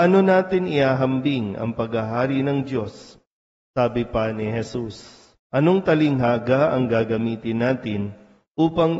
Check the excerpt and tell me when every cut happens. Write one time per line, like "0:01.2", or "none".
0:05.4